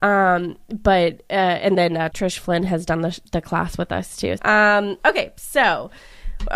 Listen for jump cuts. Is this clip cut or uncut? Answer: cut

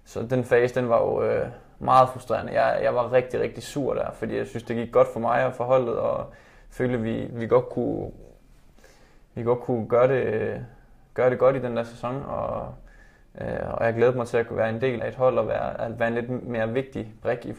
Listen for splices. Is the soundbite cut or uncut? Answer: cut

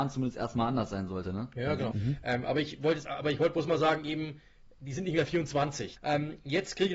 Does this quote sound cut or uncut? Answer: cut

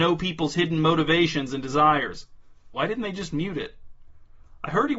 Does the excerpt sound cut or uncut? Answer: cut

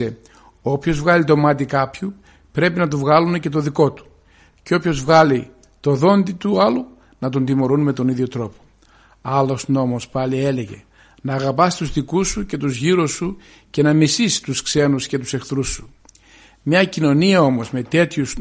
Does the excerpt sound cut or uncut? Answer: uncut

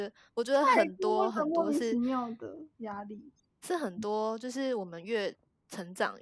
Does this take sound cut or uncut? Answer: cut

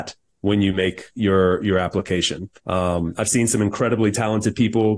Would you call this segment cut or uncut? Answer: cut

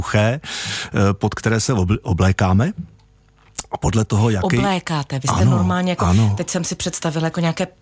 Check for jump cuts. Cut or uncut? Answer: uncut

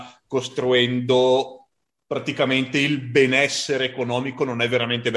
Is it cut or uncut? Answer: uncut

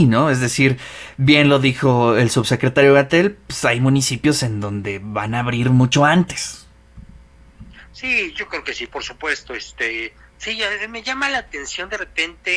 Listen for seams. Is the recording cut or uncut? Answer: uncut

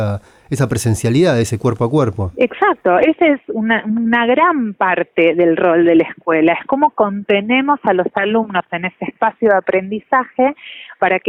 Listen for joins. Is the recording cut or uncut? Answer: uncut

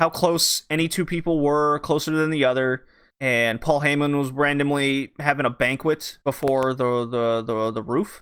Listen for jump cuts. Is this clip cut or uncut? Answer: cut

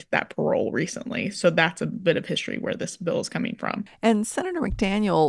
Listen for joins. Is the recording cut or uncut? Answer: cut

